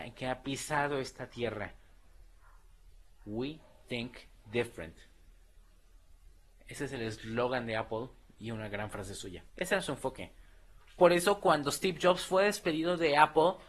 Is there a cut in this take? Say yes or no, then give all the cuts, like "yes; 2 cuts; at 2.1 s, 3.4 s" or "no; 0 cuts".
yes; 2 cuts; at 3.1 s, 9.5 s